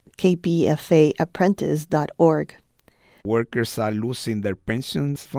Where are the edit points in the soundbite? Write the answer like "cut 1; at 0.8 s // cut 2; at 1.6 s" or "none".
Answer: cut 1; at 3.2 s